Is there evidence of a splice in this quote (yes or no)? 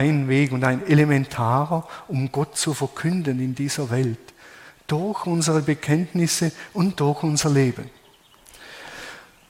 no